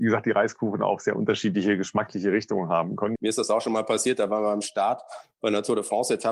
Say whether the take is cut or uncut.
cut